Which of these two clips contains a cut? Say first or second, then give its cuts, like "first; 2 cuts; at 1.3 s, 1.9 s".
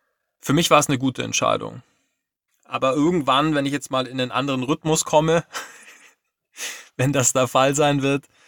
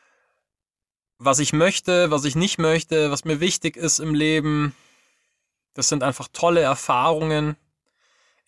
first; 1 cut; at 2.5 s